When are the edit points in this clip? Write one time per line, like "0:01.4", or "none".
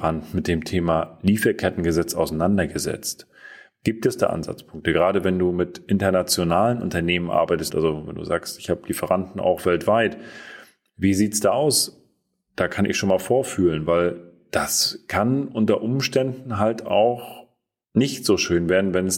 0:07.7